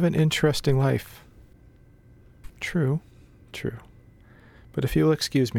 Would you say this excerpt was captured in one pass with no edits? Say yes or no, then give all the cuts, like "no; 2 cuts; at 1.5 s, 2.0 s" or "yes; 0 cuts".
no; 1 cut; at 2.5 s